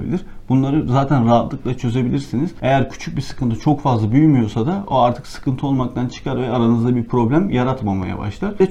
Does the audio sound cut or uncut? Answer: uncut